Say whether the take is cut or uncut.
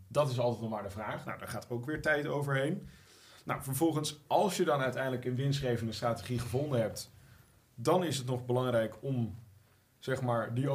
cut